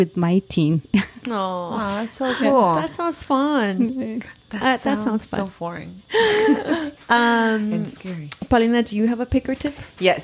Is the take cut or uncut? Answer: uncut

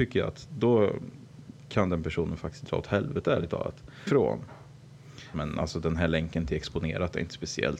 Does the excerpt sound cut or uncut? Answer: cut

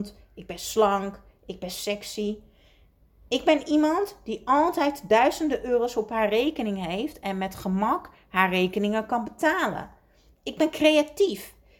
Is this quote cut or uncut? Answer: uncut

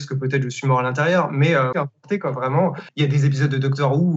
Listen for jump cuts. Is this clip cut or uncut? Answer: cut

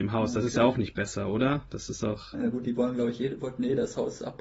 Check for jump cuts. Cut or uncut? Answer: cut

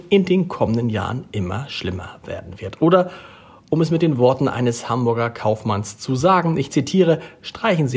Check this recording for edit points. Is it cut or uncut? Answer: uncut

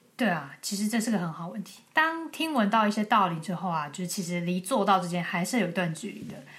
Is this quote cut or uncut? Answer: uncut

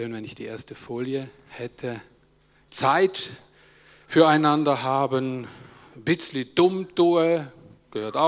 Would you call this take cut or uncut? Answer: cut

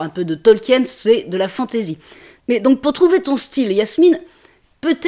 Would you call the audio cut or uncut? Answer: cut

